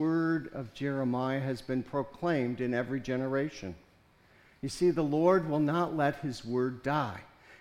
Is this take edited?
no; 0 cuts

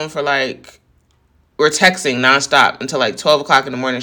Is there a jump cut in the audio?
no; 0 cuts

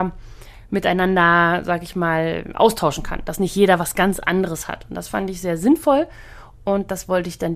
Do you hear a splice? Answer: no; 0 cuts

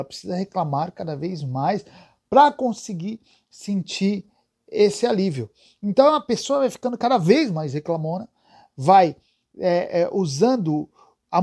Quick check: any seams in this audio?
no; 0 cuts

